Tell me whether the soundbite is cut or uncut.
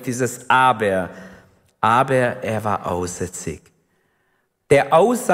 uncut